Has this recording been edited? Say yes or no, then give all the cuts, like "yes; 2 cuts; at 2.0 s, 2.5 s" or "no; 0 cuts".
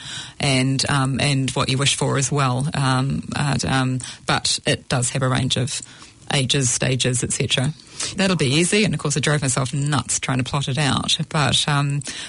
yes; 2 cuts; at 3.6 s, 8.1 s